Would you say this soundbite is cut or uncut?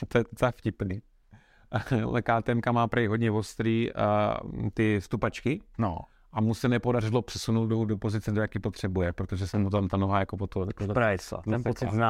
uncut